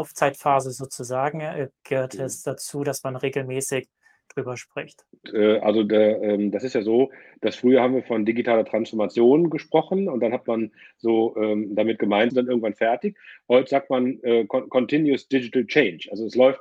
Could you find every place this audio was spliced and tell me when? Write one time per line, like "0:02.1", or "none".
0:05.2
0:12.3